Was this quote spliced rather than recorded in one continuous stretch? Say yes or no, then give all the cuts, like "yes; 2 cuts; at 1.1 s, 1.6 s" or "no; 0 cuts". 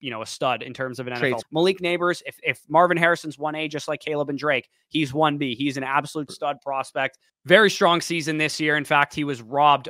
yes; 1 cut; at 1.4 s